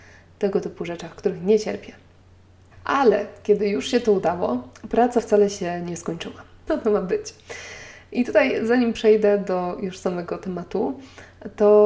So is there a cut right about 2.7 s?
yes; 2 cuts; at 2.7 s, 6.7 s

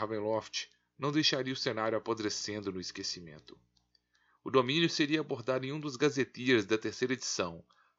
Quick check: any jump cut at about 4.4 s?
yes; 1 cut; at 4.4 s

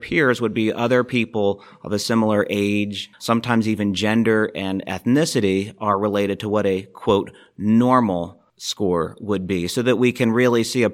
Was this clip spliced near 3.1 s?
yes; 1 cut; at 3.1 s

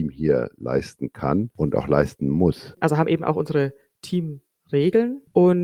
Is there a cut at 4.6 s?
no; 1 cut; at 2.7 s

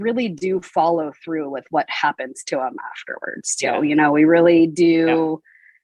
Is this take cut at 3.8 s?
no; 0 cuts

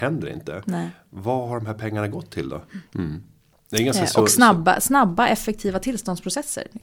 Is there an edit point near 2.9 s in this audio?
yes; 1 cut; at 2.9 s

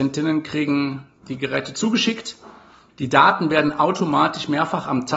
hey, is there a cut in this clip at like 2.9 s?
yes; 1 cut; at 2.9 s

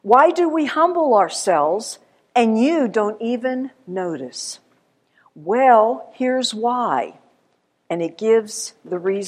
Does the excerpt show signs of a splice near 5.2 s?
no; 0 cuts

